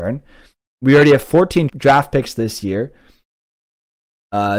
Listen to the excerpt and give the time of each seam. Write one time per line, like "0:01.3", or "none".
0:01.7